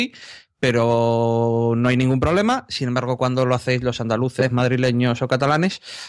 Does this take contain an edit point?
no; 0 cuts

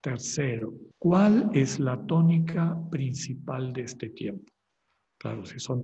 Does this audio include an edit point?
yes; 1 cut; at 0.9 s

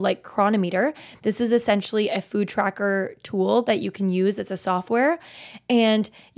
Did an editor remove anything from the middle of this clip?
no; 0 cuts

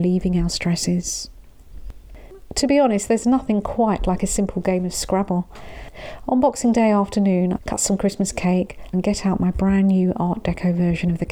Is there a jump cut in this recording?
yes; 2 cuts; at 7.6 s, 8.9 s

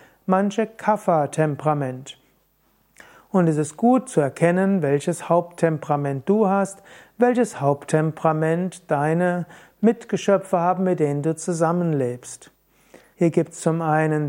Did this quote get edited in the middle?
yes; 1 cut; at 13.1 s

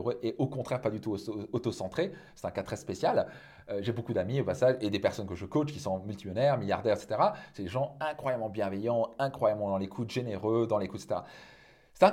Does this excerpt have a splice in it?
no; 0 cuts

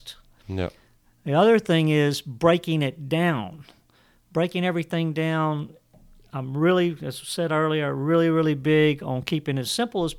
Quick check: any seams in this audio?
no; 0 cuts

